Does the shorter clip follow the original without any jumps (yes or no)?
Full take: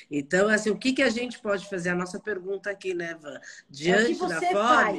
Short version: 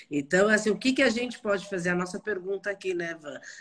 yes